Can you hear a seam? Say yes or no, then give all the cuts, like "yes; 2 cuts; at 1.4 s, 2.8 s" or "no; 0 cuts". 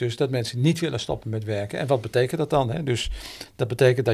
no; 0 cuts